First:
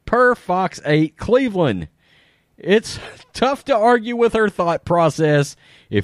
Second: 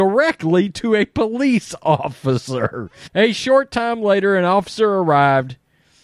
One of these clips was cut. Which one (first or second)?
second